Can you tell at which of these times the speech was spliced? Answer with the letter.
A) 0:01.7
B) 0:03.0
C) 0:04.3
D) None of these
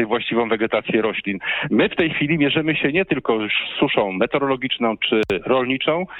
D